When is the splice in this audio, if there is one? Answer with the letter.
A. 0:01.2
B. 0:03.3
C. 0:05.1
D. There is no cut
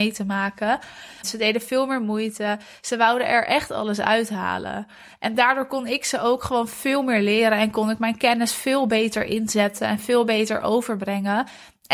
A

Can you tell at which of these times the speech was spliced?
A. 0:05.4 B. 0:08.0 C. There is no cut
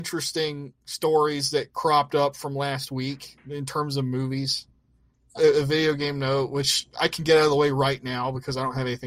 A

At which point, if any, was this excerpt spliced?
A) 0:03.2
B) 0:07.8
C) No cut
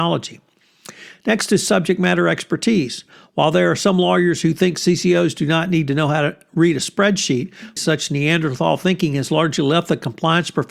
B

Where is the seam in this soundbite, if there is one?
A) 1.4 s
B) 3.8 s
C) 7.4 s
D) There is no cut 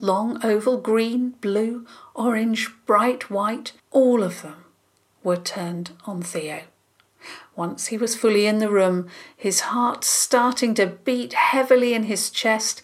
B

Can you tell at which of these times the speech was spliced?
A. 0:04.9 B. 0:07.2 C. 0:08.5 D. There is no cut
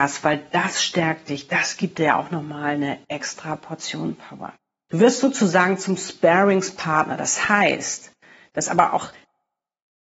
A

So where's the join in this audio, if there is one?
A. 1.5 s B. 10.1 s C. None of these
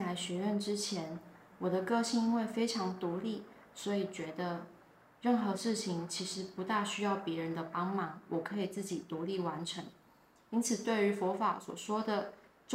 C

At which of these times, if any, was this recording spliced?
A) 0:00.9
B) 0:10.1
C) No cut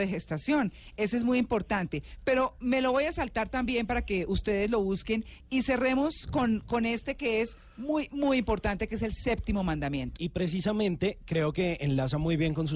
B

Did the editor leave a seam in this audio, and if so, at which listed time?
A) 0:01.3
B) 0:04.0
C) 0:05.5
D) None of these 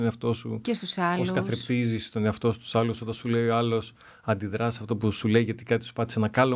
D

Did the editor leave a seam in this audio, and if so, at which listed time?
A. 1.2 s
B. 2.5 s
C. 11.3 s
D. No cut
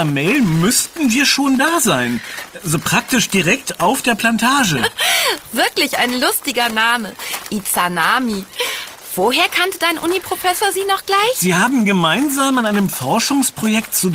D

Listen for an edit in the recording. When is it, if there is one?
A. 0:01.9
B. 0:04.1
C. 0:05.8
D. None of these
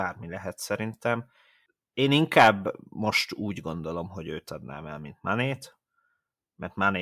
D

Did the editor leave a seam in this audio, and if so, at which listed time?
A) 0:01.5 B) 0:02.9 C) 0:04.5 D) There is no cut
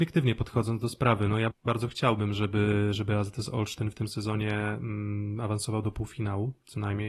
A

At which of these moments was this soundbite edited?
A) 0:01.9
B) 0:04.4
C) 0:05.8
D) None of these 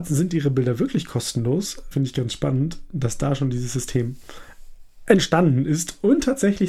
A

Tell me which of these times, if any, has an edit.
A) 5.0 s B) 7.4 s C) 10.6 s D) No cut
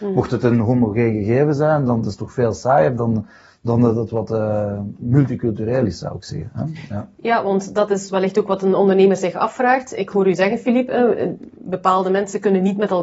D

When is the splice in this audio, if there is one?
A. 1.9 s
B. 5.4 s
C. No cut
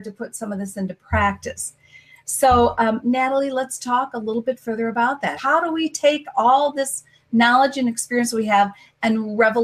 B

